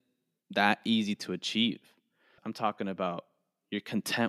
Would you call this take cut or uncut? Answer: cut